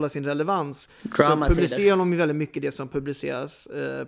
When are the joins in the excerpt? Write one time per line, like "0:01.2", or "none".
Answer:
none